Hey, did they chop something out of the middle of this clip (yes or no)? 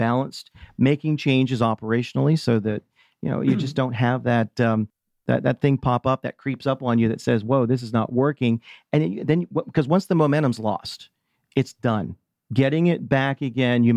no